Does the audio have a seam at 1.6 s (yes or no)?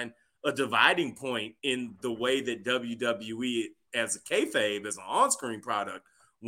yes